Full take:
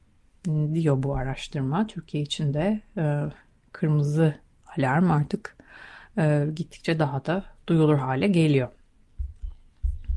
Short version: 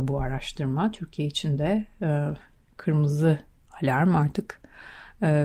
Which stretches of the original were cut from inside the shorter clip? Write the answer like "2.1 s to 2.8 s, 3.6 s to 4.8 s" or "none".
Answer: none